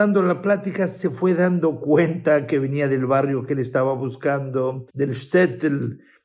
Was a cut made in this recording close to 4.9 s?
yes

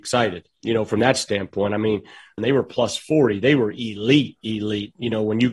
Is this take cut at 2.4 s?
yes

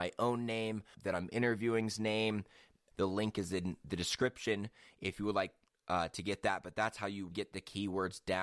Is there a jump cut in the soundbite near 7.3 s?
yes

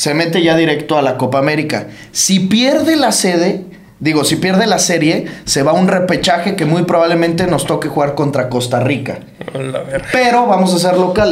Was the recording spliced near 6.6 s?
no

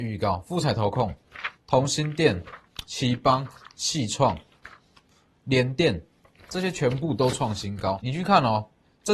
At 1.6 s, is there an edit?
yes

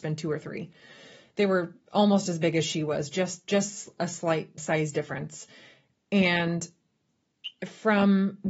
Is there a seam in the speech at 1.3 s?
no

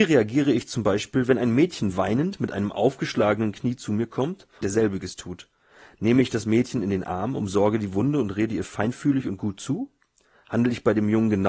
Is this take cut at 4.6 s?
yes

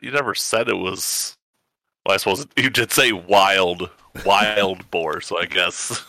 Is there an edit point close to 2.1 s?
no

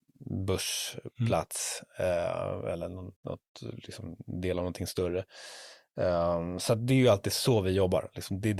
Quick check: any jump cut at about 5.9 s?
no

